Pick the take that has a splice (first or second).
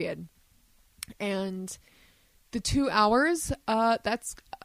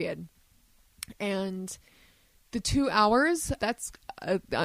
second